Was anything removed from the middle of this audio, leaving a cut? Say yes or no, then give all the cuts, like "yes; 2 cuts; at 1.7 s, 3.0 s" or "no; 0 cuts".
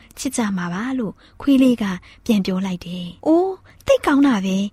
yes; 1 cut; at 3.2 s